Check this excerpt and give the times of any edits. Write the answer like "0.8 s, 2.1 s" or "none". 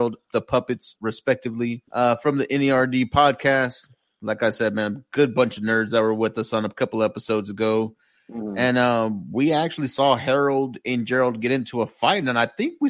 1.9 s